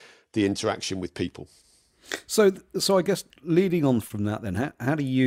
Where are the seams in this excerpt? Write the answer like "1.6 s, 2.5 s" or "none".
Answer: none